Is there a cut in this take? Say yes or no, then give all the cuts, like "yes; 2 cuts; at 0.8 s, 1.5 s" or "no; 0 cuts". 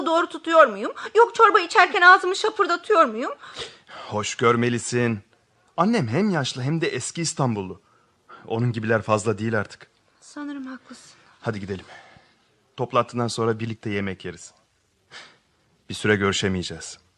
no; 0 cuts